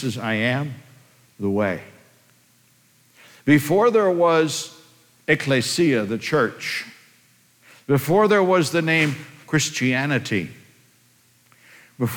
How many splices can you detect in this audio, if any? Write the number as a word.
zero